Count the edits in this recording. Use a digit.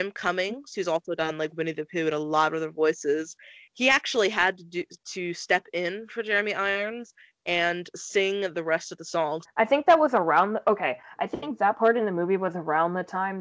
1